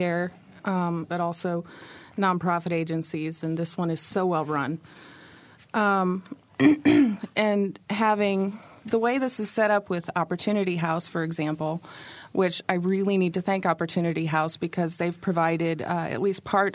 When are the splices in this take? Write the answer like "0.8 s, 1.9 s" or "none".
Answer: 1.1 s